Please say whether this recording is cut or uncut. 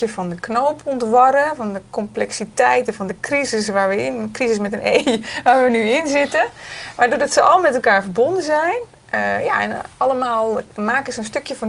uncut